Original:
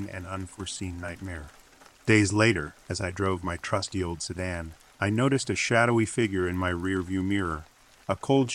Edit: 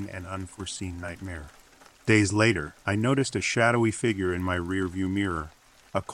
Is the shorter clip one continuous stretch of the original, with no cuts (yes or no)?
no